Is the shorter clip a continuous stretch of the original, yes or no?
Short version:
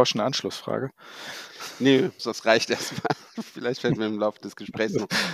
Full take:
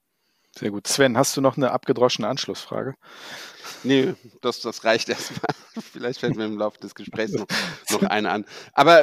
no